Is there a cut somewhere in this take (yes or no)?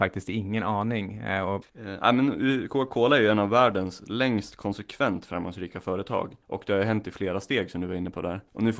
yes